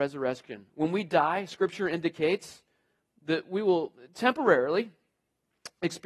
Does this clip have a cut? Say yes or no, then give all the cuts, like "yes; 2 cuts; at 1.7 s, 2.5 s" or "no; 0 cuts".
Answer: no; 0 cuts